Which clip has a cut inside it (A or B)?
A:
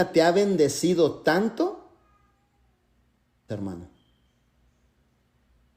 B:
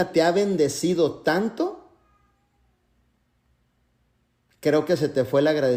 A